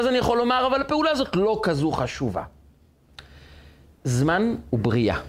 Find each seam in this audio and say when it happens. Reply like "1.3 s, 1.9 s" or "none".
none